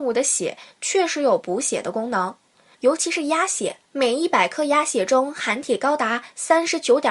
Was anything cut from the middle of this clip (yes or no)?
yes